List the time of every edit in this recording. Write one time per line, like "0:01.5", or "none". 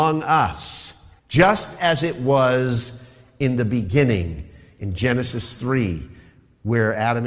0:01.2